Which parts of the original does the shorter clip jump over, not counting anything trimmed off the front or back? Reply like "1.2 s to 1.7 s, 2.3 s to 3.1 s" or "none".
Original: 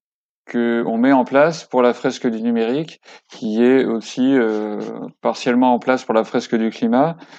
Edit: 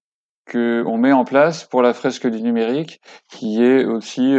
none